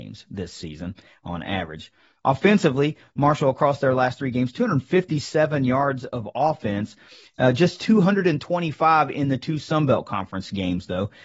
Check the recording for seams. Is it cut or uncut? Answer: uncut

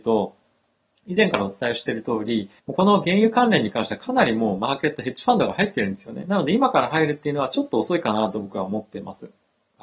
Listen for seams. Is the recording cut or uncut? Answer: cut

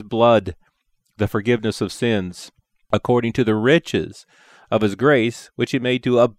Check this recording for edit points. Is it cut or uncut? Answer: uncut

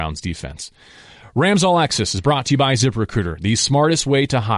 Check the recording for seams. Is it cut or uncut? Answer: uncut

